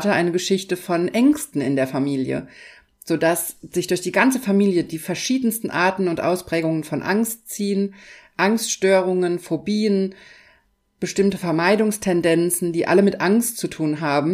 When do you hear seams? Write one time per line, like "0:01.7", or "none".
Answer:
none